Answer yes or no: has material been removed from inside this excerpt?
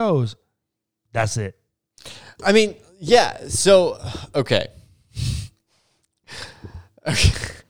no